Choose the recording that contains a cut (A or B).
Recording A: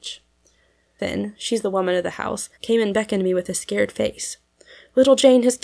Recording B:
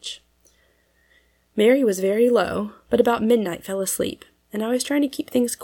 A